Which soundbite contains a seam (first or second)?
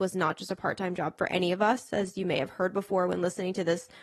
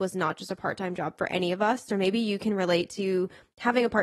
second